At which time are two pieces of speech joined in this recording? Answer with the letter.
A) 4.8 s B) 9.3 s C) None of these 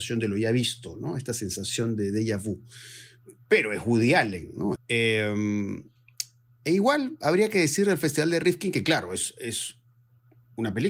A